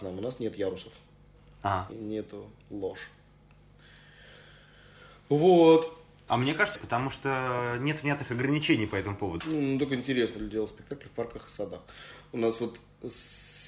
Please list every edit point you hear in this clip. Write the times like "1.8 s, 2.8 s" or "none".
6.7 s, 9.4 s